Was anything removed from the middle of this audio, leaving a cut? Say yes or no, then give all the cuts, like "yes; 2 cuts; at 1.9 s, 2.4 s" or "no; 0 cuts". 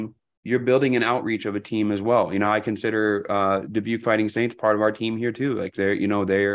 no; 0 cuts